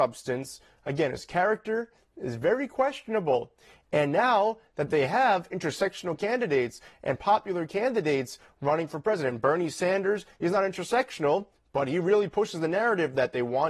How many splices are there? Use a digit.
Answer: 0